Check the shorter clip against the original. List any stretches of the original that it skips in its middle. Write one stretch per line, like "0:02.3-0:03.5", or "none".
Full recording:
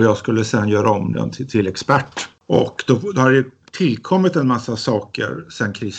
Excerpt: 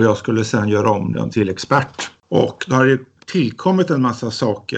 0:01.3-0:01.5
0:02.8-0:03.1